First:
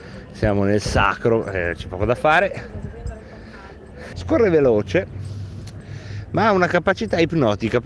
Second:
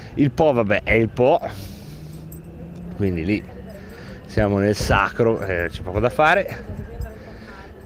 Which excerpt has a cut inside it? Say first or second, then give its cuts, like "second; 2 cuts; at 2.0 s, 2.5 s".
first; 1 cut; at 4.1 s